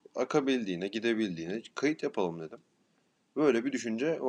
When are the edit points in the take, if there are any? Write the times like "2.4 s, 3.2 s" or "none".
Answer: none